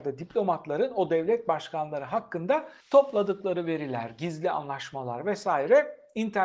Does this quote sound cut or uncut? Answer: cut